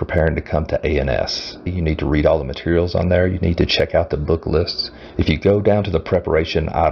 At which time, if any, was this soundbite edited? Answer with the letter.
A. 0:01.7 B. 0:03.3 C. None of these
A